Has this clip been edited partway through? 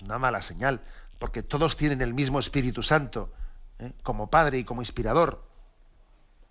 no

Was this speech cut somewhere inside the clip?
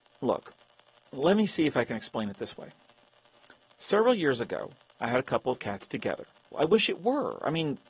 yes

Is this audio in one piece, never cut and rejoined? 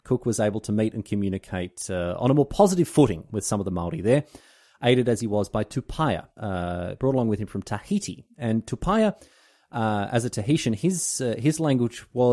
no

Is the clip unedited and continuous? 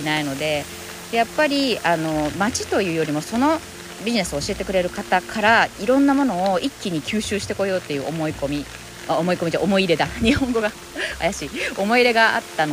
no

